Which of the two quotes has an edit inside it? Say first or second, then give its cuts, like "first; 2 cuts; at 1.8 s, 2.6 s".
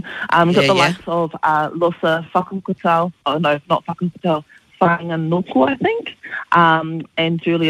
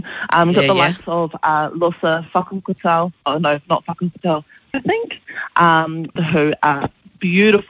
second; 2 cuts; at 4.7 s, 6.2 s